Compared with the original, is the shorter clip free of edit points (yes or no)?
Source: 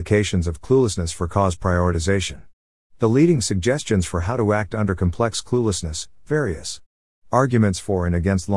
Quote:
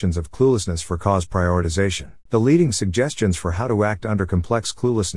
no